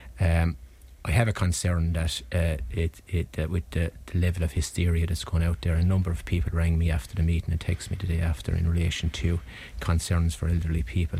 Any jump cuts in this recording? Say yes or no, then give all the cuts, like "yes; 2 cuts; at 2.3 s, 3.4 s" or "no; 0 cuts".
no; 0 cuts